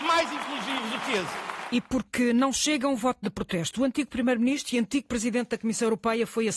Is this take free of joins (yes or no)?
yes